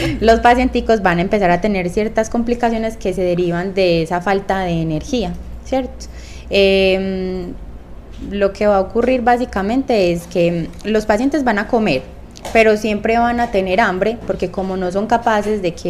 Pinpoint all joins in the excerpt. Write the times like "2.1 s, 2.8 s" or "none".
none